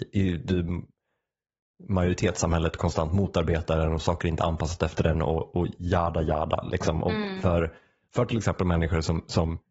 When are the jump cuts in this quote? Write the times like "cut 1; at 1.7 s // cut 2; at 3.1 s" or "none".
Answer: none

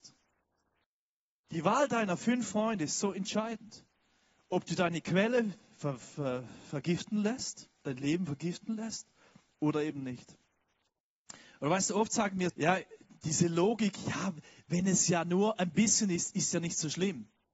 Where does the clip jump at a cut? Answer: cut 1; at 12.5 s

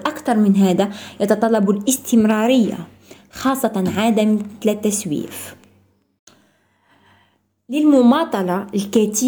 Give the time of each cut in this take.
none

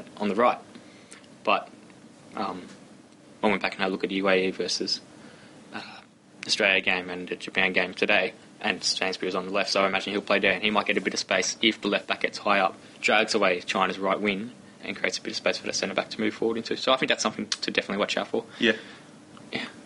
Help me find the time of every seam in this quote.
none

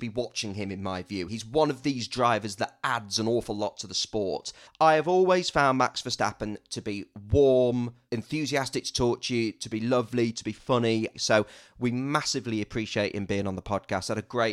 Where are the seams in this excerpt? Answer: cut 1; at 1.3 s // cut 2; at 4.7 s // cut 3; at 11.1 s

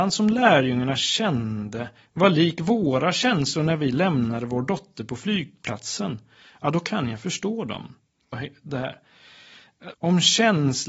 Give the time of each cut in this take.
cut 1; at 8.3 s // cut 2; at 9.9 s

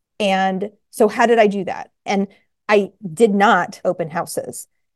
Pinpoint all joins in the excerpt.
cut 1; at 2.1 s // cut 2; at 3.8 s

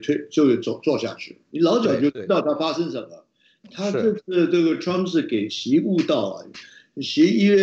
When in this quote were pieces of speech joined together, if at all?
cut 1; at 1.5 s

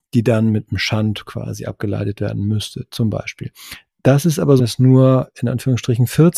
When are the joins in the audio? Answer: cut 1; at 4.6 s

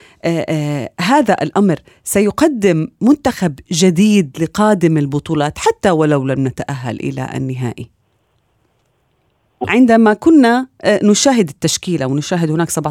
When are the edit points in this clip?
cut 1; at 9.6 s

